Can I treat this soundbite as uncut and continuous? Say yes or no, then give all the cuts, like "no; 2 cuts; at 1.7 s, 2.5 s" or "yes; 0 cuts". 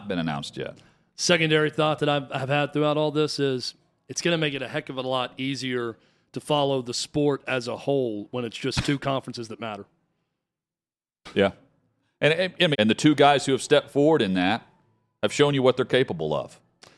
no; 1 cut; at 12.7 s